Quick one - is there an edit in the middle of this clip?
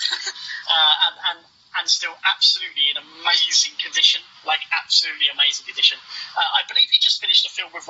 no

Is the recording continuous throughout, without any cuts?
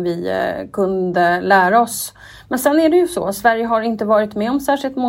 yes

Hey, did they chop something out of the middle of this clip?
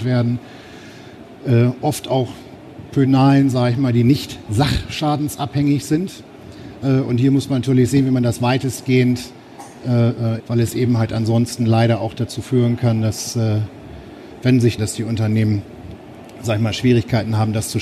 yes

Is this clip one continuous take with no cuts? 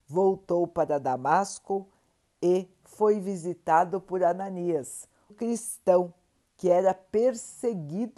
no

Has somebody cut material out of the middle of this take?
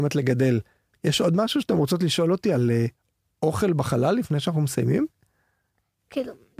yes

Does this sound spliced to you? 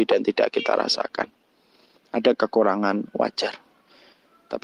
no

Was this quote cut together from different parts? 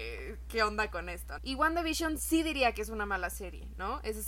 yes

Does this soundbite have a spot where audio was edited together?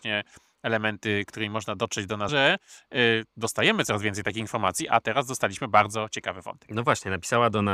yes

